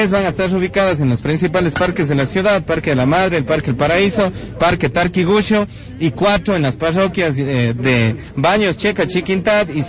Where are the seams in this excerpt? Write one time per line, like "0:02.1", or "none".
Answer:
none